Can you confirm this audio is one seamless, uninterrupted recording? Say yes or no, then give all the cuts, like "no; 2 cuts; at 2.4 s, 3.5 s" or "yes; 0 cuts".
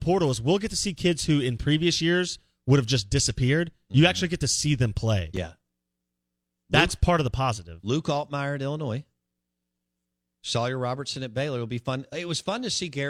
yes; 0 cuts